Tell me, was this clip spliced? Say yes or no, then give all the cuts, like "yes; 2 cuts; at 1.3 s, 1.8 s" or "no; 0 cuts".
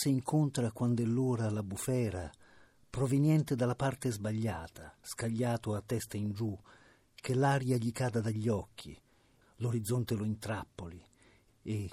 yes; 2 cuts; at 5.0 s, 9.4 s